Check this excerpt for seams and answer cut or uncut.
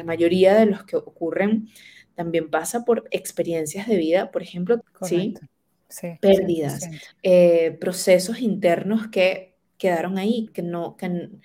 cut